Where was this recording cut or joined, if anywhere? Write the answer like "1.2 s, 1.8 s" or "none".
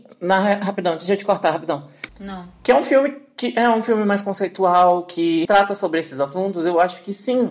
2.1 s, 5.5 s